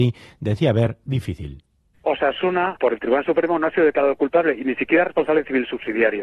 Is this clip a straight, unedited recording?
yes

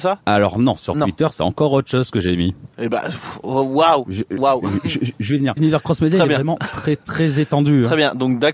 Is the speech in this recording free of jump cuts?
no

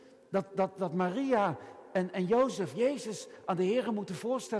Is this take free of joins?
yes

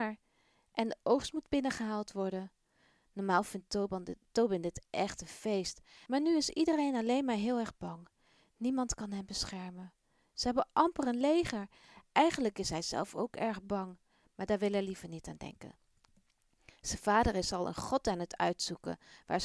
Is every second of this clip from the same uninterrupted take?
no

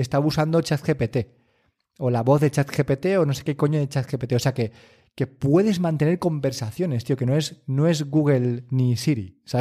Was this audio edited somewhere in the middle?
no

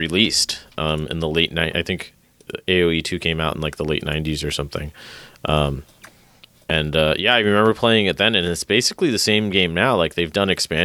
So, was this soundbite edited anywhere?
no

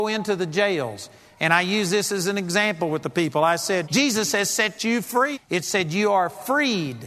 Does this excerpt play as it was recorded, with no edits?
no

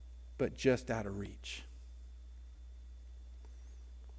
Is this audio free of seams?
yes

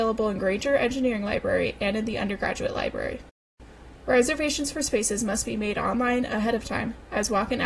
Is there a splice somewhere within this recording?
no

